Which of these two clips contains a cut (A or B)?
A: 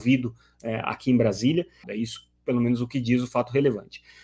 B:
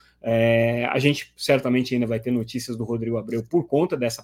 A